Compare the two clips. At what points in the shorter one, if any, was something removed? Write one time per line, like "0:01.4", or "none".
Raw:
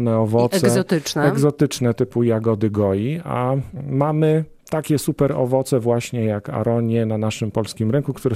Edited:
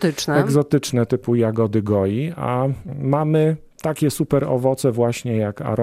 none